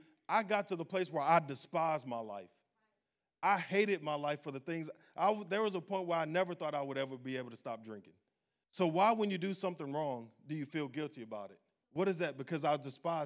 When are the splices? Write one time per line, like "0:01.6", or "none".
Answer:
0:08.6
0:11.8